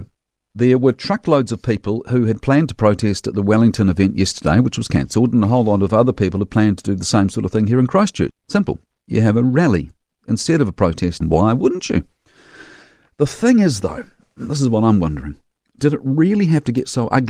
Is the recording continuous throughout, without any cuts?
no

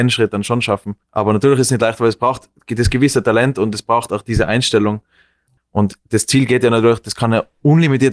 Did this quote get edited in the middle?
yes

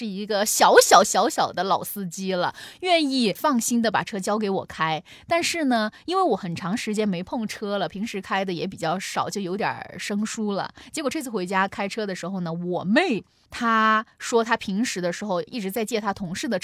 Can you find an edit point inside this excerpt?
no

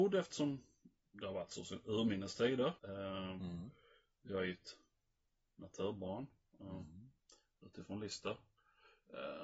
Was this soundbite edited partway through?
yes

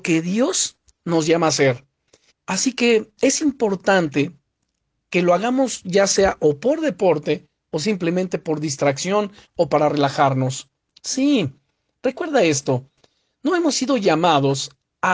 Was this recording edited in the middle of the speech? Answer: yes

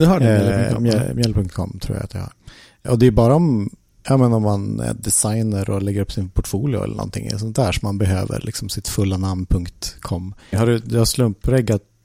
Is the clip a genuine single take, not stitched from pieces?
no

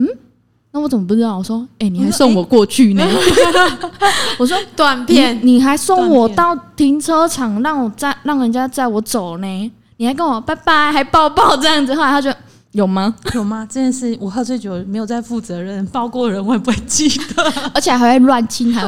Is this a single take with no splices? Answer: yes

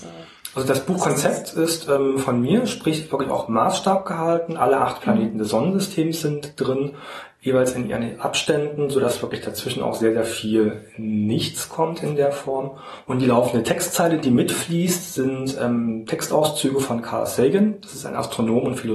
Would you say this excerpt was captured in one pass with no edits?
yes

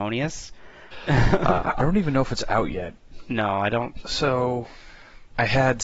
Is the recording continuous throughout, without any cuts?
no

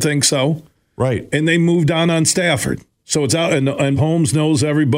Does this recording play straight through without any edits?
no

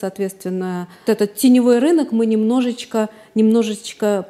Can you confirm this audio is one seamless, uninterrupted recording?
no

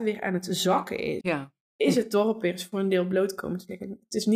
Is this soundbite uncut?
no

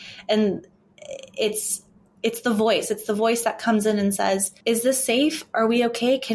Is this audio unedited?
no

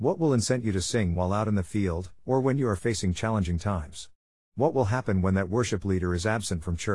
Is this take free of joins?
no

